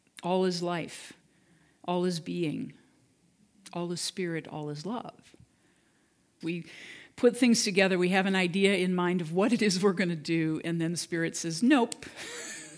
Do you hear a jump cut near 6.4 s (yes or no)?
yes